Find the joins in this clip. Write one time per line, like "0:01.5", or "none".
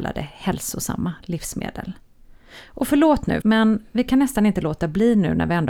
0:03.4